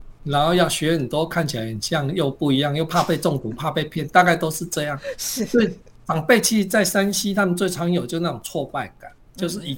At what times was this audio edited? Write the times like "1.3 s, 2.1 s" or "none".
none